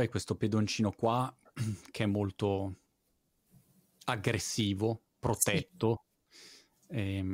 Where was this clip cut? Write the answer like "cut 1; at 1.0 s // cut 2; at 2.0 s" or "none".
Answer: none